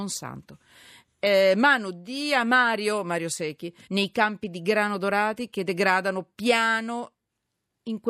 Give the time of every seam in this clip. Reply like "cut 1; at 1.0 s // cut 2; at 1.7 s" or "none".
cut 1; at 3.8 s // cut 2; at 6.3 s